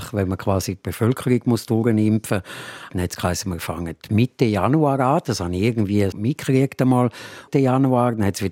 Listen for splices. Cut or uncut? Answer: cut